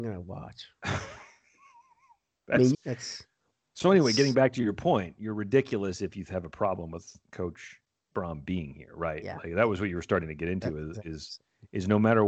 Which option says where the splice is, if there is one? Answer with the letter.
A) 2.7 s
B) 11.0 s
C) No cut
A